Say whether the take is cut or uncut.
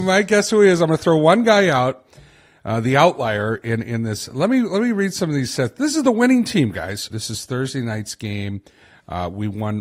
cut